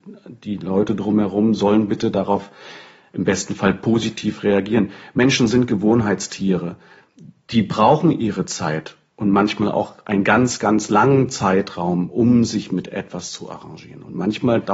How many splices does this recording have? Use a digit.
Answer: 0